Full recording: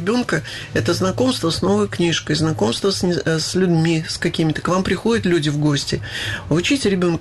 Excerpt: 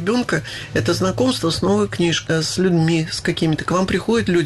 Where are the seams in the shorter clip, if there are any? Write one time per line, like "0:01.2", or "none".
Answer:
0:02.3